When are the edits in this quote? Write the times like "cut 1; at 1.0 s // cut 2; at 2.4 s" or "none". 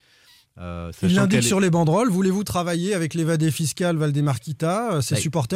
none